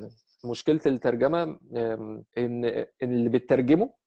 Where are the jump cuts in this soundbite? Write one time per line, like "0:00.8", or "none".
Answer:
0:02.3